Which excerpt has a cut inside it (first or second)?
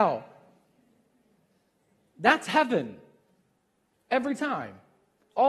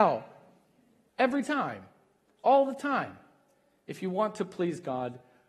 second